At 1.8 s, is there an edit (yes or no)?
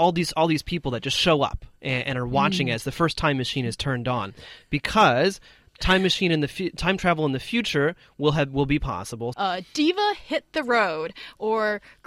no